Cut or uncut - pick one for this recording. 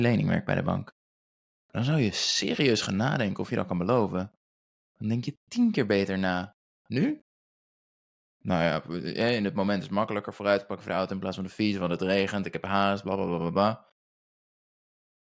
uncut